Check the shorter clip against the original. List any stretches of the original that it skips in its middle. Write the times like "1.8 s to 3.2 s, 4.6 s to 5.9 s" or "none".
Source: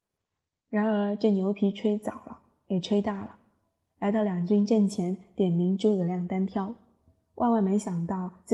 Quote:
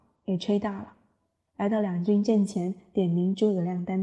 none